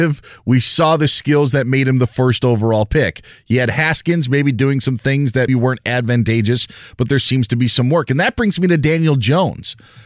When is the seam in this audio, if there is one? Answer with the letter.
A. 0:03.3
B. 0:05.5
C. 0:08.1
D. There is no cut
B